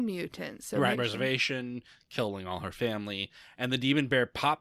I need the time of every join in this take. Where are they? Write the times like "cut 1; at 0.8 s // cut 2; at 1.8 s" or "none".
cut 1; at 0.9 s